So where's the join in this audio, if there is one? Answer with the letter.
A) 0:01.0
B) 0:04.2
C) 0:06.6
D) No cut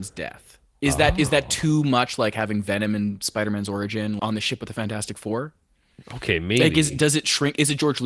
B